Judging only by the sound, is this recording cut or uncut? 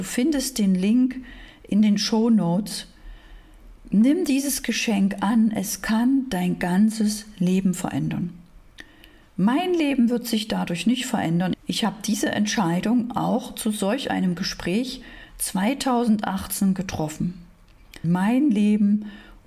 cut